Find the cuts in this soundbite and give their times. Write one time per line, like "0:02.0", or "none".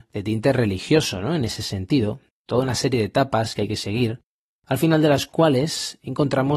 0:02.3